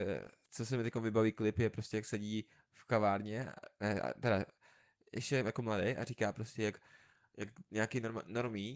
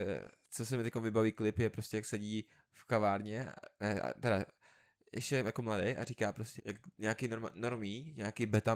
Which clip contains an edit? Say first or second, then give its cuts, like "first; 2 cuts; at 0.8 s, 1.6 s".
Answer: second; 1 cut; at 6.6 s